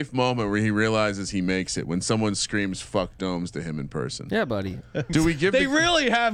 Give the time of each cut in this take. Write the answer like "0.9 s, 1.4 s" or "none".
5.1 s